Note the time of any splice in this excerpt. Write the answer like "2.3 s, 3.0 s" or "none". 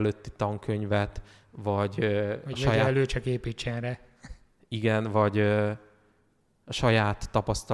none